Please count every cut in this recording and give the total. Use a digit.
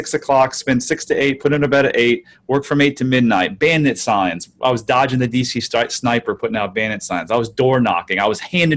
0